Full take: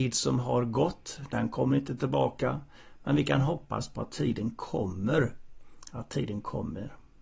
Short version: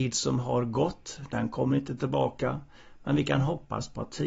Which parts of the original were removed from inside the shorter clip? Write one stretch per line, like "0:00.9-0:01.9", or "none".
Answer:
none